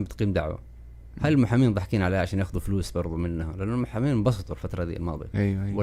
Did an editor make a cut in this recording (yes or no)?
no